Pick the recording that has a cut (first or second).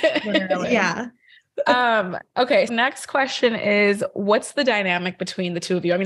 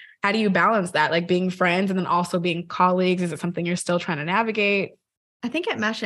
first